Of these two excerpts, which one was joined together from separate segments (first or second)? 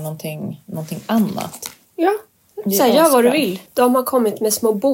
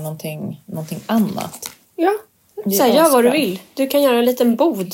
first